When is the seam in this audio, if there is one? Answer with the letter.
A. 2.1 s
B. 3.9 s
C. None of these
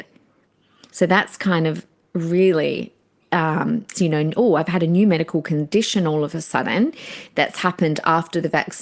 B